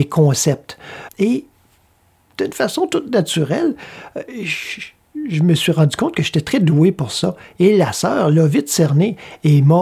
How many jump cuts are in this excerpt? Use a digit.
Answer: 1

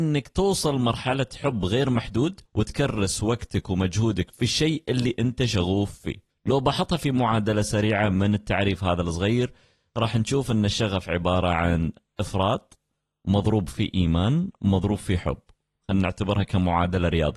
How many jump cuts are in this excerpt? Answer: 0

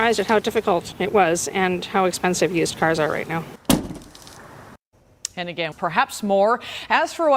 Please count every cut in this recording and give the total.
1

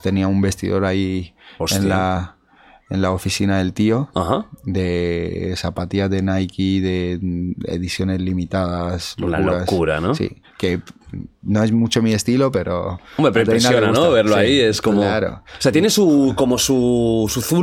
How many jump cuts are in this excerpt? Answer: 0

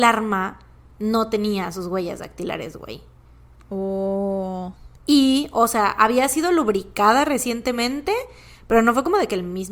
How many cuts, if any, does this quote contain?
1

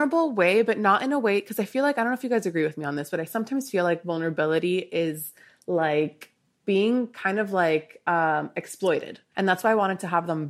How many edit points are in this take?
2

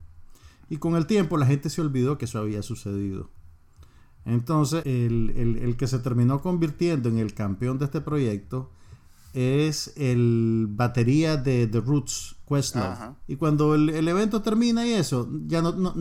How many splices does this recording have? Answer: 2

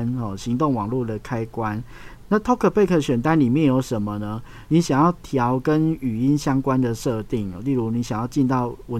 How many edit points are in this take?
1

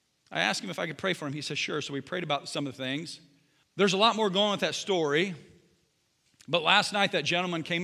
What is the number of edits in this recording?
1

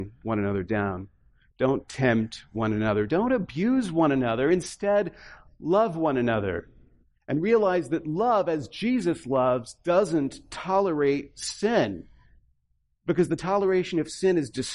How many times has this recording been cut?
1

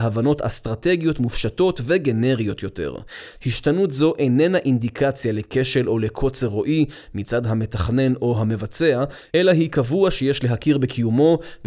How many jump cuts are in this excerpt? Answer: 1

